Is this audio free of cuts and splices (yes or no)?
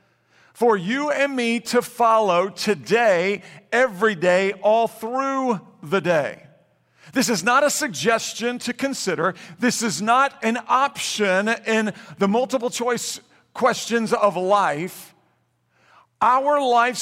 yes